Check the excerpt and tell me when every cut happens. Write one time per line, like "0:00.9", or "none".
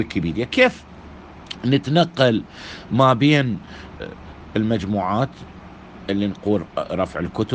0:04.0

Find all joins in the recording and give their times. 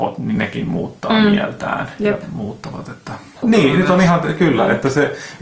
0:03.4

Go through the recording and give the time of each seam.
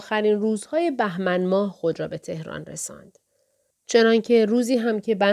0:03.7

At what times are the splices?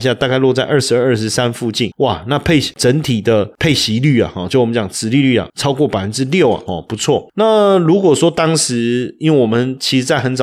0:06.7

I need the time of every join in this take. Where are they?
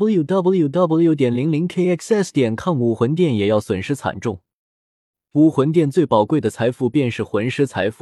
none

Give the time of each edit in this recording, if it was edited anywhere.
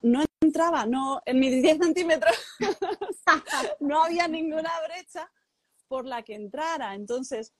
none

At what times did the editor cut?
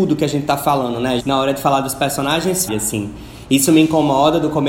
0:01.2
0:02.7

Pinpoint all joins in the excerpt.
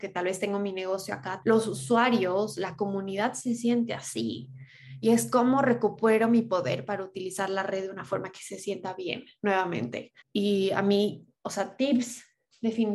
0:01.4
0:10.2

